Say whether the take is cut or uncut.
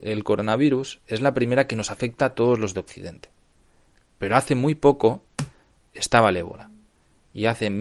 uncut